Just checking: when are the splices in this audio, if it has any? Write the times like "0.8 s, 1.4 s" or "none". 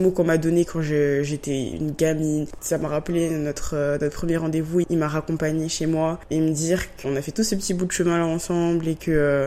2.6 s, 7.0 s